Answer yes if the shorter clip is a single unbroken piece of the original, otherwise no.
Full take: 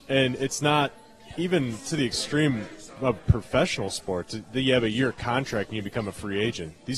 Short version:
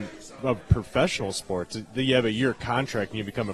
yes